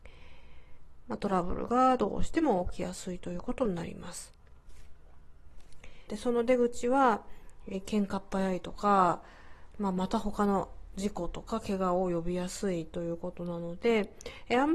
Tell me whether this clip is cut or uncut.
cut